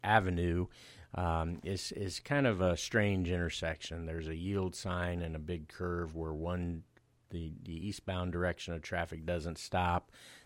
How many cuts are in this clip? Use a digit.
0